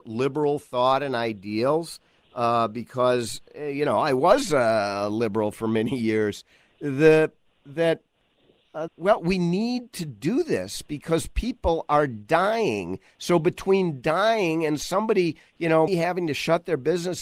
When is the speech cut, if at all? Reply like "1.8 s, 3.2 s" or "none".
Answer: 8.9 s, 15.9 s